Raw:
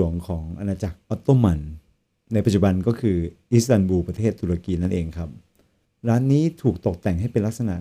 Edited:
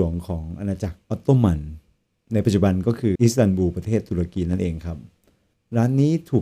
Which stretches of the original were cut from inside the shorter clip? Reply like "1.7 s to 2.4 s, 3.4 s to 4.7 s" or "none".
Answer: 3.2 s to 3.5 s

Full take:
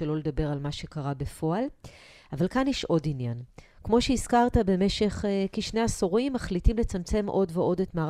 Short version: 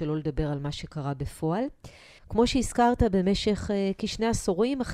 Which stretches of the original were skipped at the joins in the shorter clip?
2.2 s to 3.7 s

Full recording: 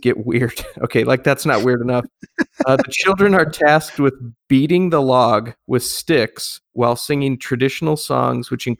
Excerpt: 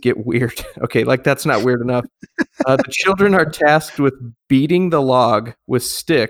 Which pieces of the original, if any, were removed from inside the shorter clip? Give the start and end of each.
none

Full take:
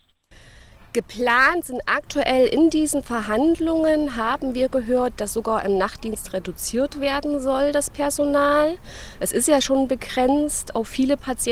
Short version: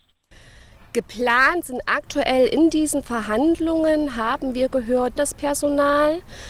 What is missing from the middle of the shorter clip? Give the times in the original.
5.2 s to 7.7 s

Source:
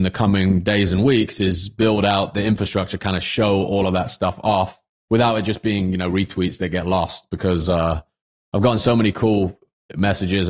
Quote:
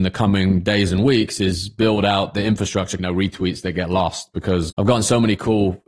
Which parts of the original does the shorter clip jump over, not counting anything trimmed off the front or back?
3.0 s to 6.0 s, 7.7 s to 8.4 s

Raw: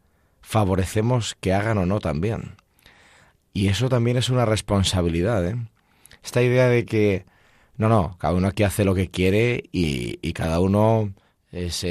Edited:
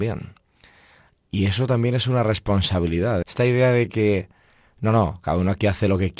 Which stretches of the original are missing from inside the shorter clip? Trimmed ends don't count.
5.4 s to 6.2 s

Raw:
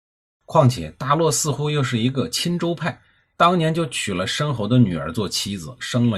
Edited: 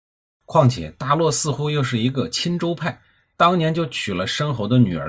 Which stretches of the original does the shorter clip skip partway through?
none

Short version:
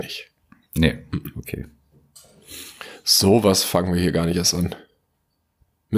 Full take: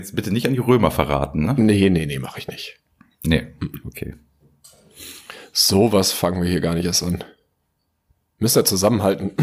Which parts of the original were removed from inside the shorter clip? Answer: none

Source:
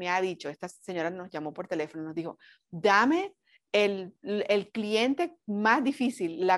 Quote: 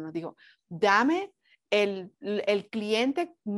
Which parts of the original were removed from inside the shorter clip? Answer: none

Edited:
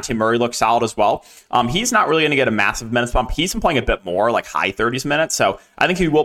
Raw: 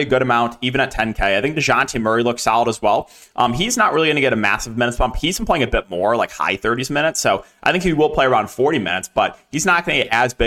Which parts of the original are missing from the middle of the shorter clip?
none

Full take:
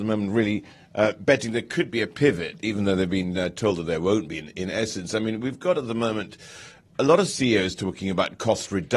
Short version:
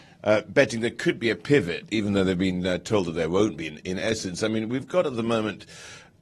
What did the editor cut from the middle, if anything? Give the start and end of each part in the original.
none

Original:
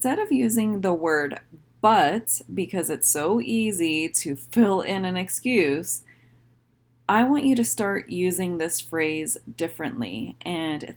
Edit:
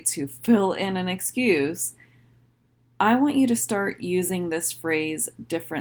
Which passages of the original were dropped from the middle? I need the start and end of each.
none

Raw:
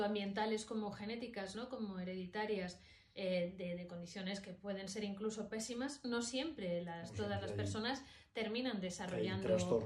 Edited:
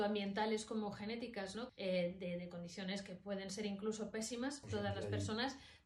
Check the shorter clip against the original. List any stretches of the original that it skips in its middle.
1.7 s to 3.1 s, 6.0 s to 7.1 s

